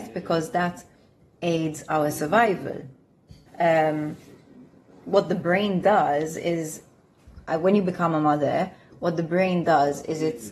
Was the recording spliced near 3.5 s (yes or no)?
yes